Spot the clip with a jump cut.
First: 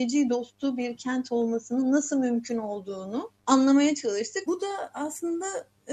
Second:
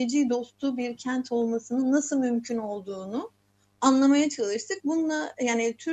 first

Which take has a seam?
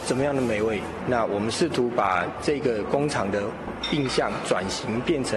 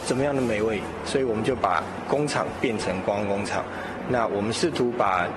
first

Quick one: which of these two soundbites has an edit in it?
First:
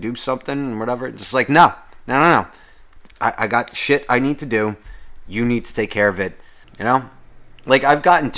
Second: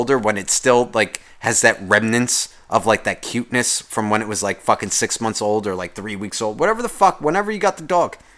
first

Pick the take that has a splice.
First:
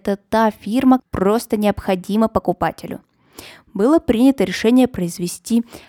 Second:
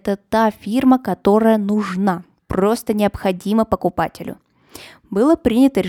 first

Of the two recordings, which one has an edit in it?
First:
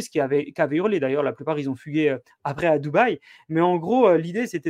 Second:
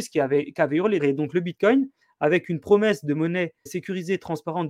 second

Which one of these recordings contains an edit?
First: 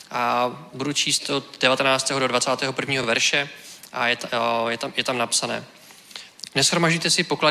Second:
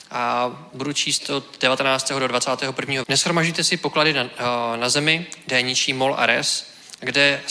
second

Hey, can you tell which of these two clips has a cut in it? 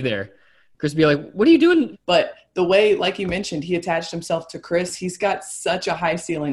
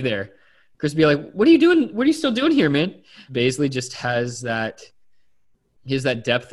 first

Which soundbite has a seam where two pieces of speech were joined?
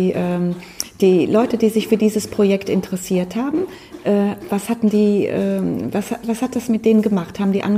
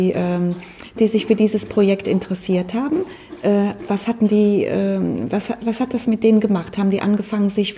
second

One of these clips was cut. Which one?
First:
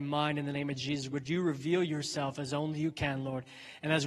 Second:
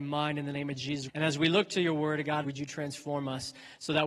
second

